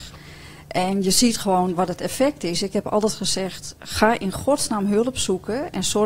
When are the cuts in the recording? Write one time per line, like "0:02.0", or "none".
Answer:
none